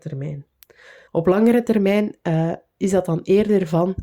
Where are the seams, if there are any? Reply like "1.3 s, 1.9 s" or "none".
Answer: 1.1 s